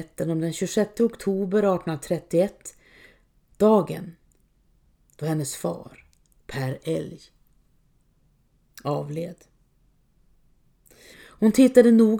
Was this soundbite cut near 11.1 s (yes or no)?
yes